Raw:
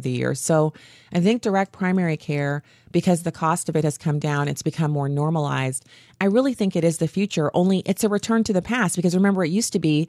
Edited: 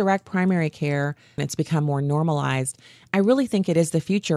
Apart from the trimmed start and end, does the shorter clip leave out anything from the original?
yes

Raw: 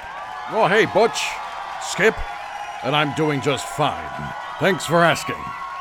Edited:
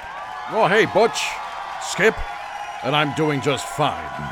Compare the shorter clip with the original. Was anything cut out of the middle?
no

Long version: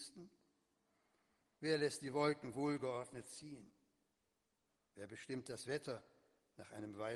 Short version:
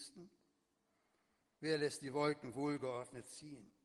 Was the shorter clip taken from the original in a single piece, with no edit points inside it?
yes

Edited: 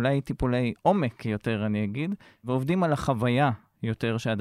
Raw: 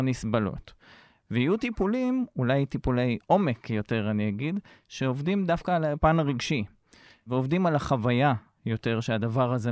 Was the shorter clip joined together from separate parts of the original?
yes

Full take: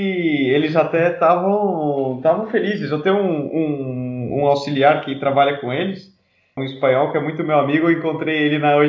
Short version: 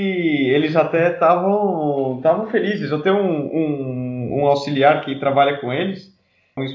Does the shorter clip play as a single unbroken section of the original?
yes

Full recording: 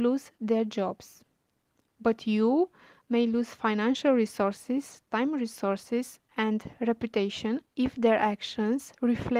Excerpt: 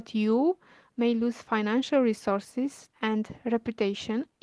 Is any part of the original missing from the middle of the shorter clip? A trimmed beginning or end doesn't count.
yes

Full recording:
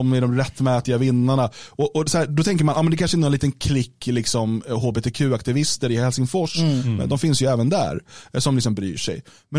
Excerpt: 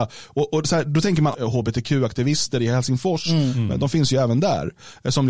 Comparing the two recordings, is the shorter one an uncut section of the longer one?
no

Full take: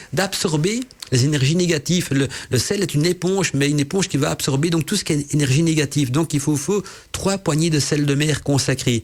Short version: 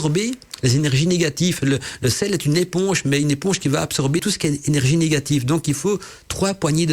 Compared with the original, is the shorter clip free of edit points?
no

